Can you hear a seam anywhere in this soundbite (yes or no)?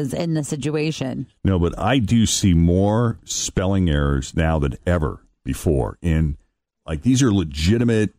no